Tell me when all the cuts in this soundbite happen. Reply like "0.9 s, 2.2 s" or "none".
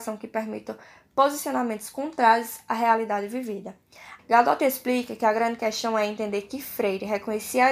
4.2 s